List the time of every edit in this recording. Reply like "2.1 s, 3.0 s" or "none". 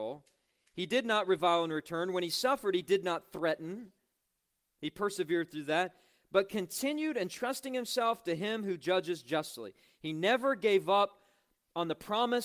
none